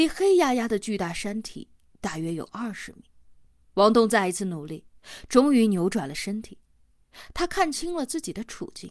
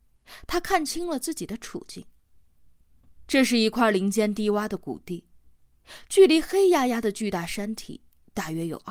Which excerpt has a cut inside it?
first; 1 cut; at 3.6 s

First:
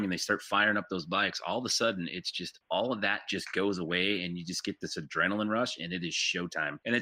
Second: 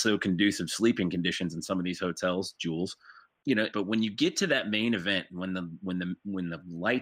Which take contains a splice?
second; 1 cut; at 3.7 s

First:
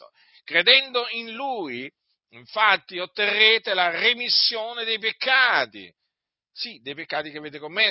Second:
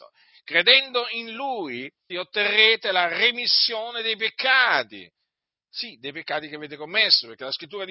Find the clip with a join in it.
second; 1 cut; at 2.1 s

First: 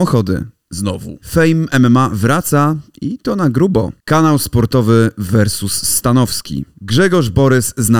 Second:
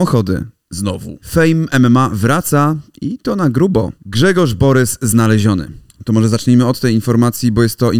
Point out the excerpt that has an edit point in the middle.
second; 1 cut; at 4.0 s

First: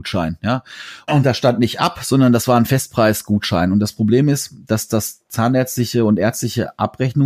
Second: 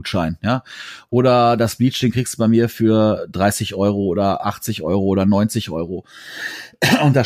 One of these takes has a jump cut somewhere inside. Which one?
first; 1 cut; at 1.1 s

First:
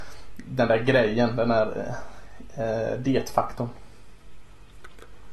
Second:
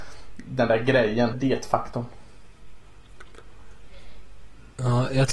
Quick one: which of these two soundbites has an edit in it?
second; 1 cut; at 1.3 s

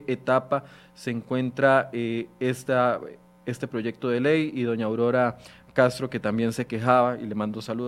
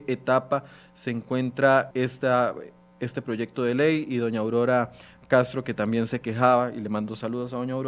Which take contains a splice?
second; 1 cut; at 1.9 s

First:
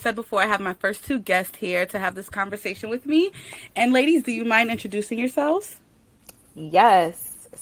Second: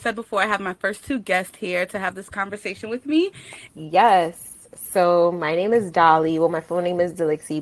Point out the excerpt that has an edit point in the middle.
second; 1 cut; at 3.7 s

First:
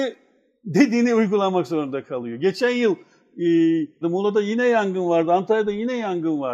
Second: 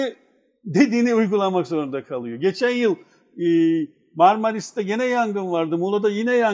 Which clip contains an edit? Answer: first; 1 cut; at 4.0 s

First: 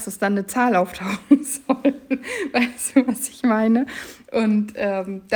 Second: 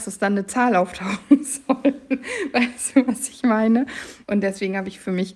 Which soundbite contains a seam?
second; 1 cut; at 4.2 s

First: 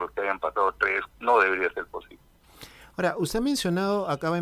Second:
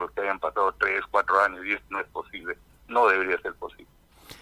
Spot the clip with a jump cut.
first; 1 cut; at 1.1 s

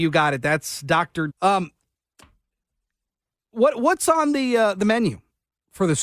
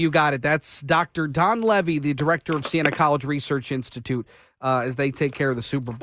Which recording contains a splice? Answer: first; 1 cut; at 1.3 s

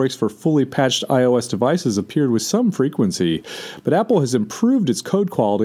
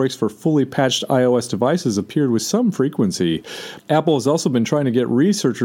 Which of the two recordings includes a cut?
second; 1 cut; at 3.8 s

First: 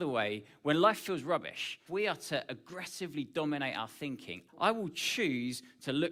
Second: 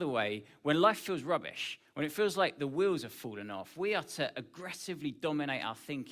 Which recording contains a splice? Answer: first; 2 cuts; at 1.9 s, 4.5 s

